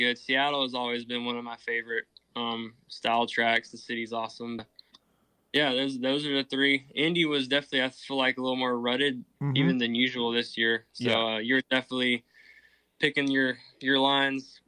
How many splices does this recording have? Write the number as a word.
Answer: one